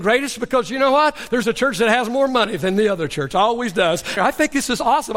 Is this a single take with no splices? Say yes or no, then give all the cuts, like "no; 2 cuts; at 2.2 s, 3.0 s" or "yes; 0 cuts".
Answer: no; 2 cuts; at 1.4 s, 4.2 s